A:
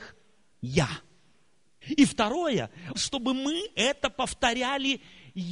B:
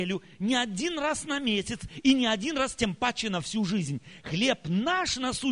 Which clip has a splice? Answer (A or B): A